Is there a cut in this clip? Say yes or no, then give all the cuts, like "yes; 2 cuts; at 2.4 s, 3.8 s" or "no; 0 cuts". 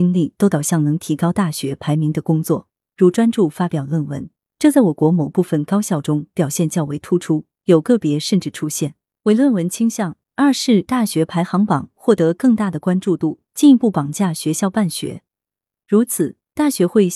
no; 0 cuts